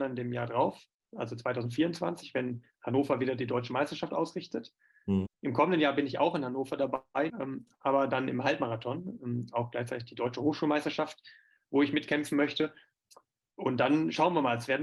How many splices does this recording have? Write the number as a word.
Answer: two